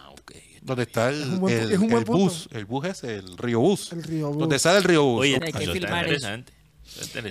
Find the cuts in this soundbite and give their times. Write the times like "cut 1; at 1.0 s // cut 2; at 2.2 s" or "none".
cut 1; at 5.4 s